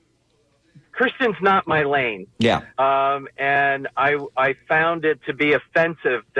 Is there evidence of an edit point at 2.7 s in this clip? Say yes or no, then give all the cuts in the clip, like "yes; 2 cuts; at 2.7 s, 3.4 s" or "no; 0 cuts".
yes; 1 cut; at 2.7 s